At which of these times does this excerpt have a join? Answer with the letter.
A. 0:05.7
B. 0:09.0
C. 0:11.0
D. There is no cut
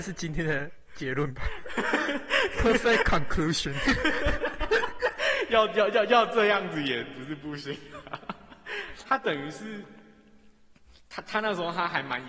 B